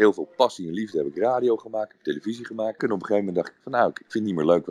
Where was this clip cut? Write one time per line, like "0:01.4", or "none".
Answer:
0:02.8